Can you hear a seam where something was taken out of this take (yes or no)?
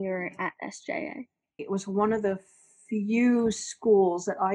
yes